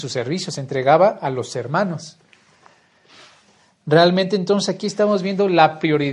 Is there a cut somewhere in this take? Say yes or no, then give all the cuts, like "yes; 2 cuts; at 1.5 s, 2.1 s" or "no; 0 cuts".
no; 0 cuts